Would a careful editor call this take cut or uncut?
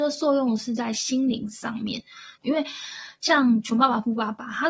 cut